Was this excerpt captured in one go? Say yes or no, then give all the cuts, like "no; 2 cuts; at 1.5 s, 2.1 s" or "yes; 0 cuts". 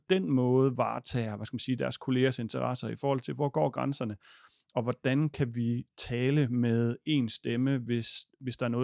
yes; 0 cuts